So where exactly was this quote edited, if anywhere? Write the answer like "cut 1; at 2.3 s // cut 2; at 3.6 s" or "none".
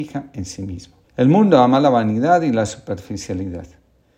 cut 1; at 1.0 s